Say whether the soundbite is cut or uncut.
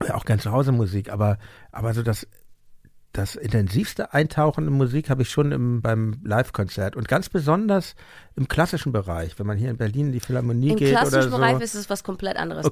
uncut